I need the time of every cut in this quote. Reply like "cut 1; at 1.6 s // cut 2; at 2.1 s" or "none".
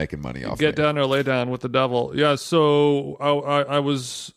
none